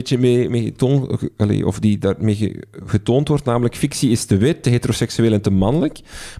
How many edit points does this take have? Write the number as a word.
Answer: one